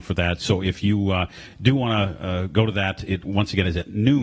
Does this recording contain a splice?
no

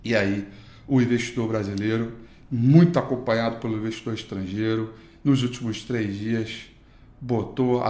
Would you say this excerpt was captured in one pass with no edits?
yes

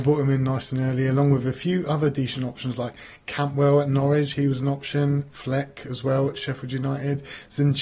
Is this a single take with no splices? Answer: yes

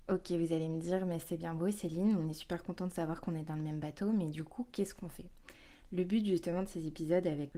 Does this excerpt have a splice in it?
no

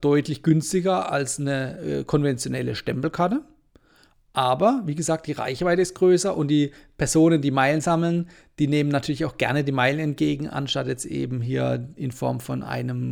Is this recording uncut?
yes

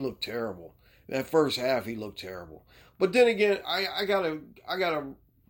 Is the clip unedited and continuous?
yes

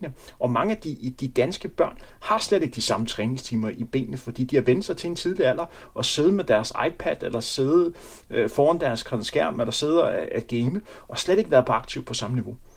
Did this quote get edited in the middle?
no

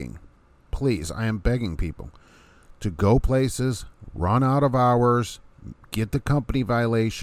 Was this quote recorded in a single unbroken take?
yes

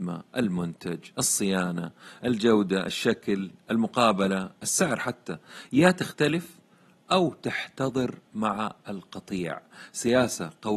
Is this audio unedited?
yes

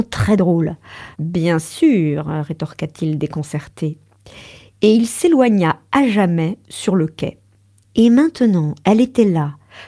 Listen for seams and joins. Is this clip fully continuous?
no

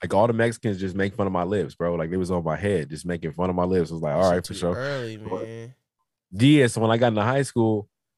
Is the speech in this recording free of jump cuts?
yes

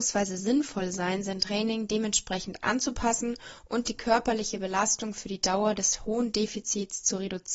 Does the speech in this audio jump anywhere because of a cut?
no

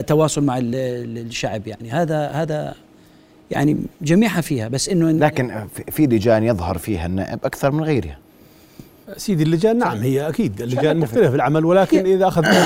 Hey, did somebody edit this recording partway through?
yes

